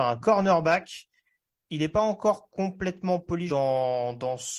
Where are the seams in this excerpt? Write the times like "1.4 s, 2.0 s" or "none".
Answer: 1.6 s, 3.5 s

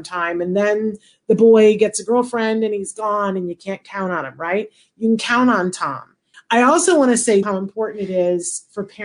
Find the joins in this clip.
6.3 s, 7.4 s

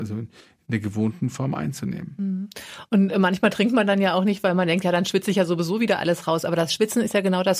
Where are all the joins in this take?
none

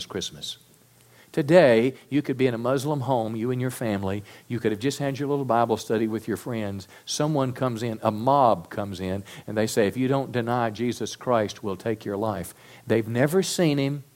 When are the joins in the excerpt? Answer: 1.2 s

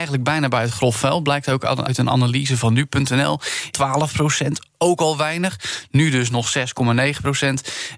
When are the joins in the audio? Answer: 1.9 s, 3.7 s

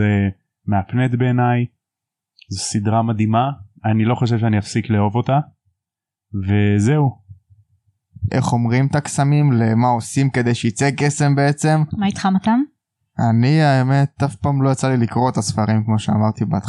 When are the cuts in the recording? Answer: 8.3 s, 11.9 s

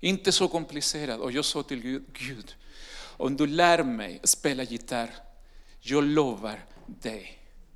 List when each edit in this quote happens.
none

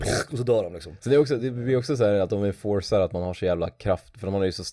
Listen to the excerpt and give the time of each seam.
none

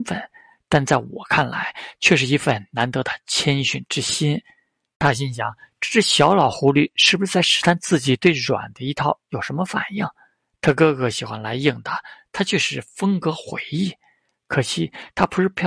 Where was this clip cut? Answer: none

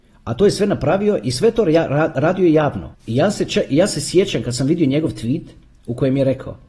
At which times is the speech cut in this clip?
2.9 s

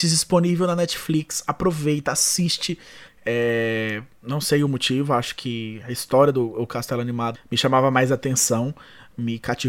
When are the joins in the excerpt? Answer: 3.1 s, 7.3 s

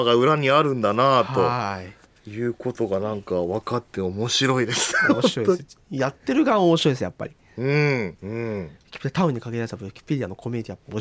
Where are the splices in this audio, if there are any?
8.2 s

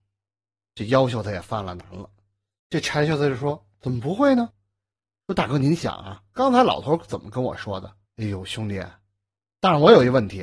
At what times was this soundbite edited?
2.6 s, 8.0 s

